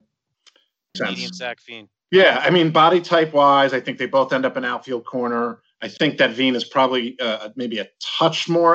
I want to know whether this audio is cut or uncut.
cut